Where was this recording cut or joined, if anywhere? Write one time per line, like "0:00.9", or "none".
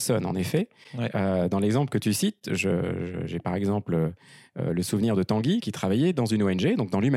none